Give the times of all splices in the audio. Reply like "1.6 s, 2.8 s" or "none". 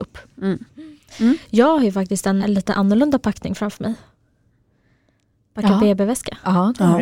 2.4 s